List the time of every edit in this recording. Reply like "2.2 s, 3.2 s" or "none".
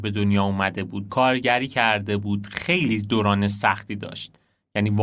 1.1 s